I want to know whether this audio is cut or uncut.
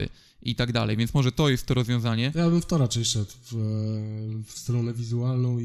uncut